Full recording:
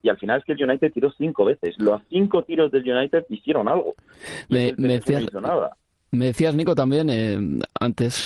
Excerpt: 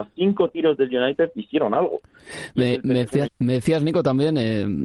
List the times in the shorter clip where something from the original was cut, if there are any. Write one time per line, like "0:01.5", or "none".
0:03.2